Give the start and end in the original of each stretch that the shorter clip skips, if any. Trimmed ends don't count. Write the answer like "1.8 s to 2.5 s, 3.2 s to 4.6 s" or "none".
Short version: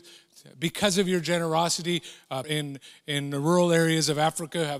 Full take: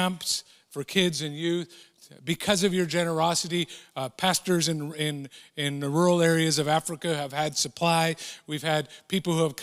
4.1 s to 4.9 s